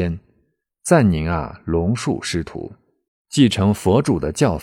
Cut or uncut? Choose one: cut